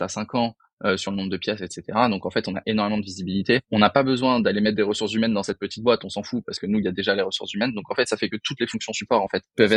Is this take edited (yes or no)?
no